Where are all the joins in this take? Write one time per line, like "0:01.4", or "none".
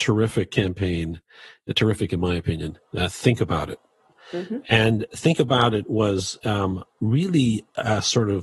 none

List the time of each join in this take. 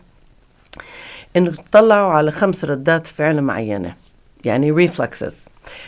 none

